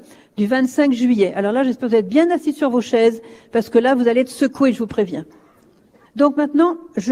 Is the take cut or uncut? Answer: cut